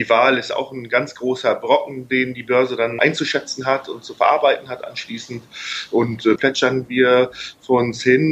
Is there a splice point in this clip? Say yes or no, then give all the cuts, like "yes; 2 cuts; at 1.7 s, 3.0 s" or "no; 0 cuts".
yes; 2 cuts; at 3.0 s, 6.4 s